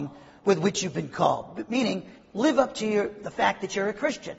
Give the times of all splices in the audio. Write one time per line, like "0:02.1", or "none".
none